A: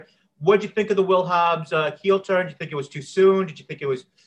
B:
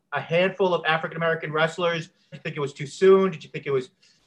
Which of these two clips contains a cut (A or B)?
B